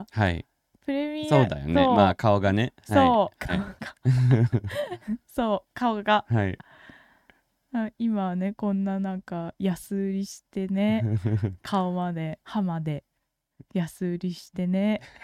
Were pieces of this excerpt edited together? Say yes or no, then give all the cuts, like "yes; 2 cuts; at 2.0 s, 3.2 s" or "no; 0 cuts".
yes; 2 cuts; at 3.8 s, 12.4 s